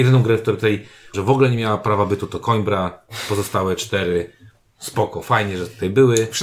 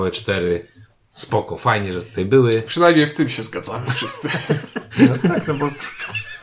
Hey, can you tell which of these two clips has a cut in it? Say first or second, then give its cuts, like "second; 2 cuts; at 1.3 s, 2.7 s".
first; 1 cut; at 1.1 s